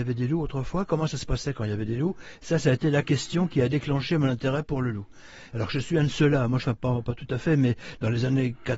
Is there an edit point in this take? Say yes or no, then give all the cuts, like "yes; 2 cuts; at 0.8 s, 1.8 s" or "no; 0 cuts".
yes; 2 cuts; at 5.5 s, 6.6 s